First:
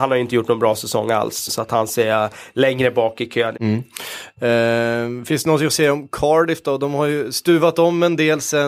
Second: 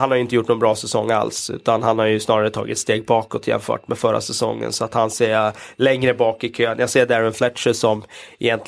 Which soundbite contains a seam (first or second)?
first